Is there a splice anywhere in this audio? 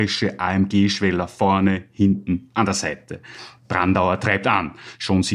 no; 0 cuts

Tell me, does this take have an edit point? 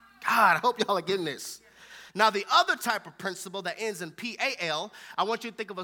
yes; 1 cut; at 2.1 s

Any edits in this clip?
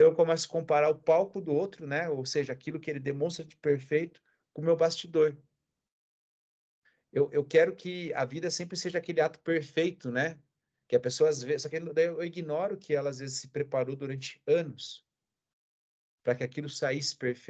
no; 0 cuts

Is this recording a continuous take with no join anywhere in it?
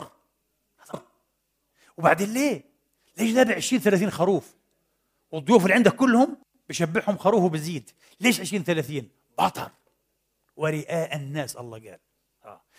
no; 1 cut; at 0.9 s

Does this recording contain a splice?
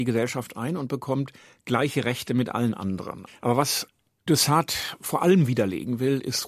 yes; 1 cut; at 3.3 s

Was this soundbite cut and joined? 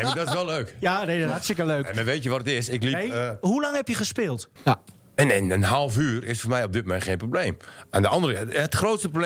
yes; 1 cut; at 4.6 s

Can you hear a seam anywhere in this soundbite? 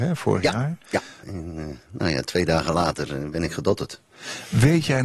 yes; 1 cut; at 1.2 s

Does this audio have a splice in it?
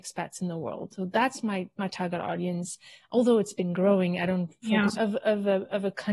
yes; 2 cuts; at 1.0 s, 5.0 s

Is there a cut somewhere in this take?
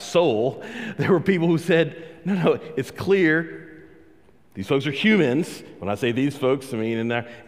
no; 0 cuts

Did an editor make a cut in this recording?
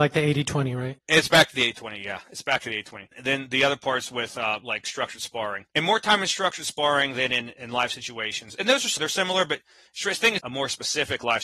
yes; 2 cuts; at 9.0 s, 10.4 s

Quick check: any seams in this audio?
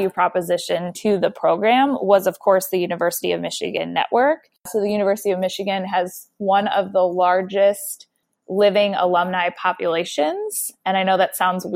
no; 0 cuts

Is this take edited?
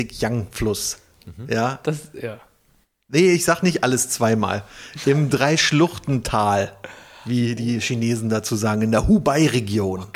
no; 0 cuts

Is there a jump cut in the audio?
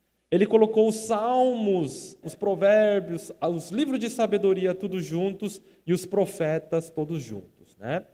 yes; 1 cut; at 2.2 s

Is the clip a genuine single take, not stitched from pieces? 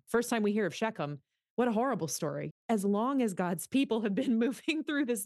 no; 1 cut; at 2.5 s

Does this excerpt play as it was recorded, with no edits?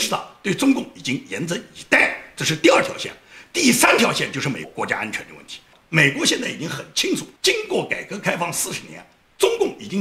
no; 2 cuts; at 4.6 s, 7.4 s

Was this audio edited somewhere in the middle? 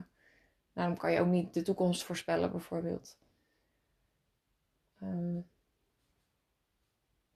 no; 0 cuts

